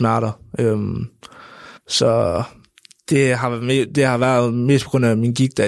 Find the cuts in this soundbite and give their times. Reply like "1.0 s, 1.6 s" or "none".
1.8 s